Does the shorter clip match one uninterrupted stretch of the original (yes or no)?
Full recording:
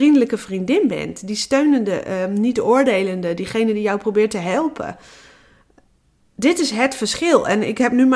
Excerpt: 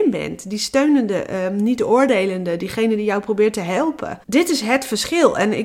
no